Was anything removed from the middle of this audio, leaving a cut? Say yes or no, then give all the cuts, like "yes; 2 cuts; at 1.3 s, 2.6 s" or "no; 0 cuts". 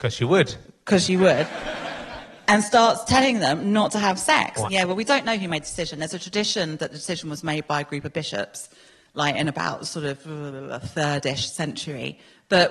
yes; 1 cut; at 4.7 s